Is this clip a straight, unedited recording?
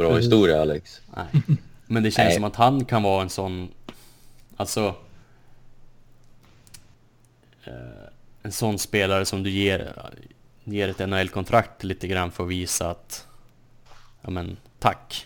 yes; 0 cuts

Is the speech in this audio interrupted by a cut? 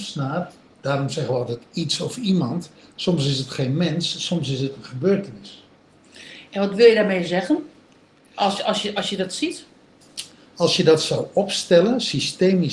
no; 0 cuts

